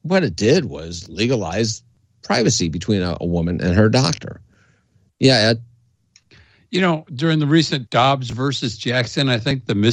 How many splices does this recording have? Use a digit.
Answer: 1